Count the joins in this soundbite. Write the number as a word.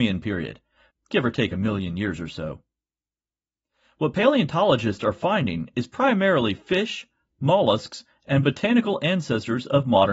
one